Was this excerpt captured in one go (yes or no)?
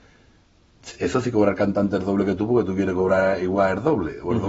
yes